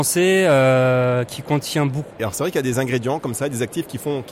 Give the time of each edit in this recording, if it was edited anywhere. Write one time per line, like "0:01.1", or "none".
0:02.2